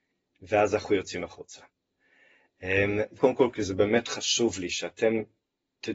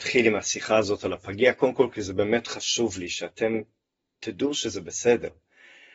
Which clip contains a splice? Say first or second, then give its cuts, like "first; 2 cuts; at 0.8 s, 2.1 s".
first; 1 cut; at 3.2 s